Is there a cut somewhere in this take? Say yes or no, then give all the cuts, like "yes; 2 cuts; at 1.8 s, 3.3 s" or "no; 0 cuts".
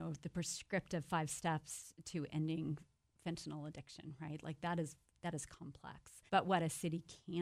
yes; 1 cut; at 6.3 s